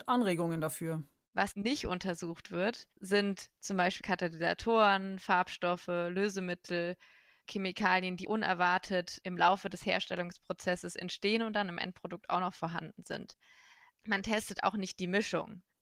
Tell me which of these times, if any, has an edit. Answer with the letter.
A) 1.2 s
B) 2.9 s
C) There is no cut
C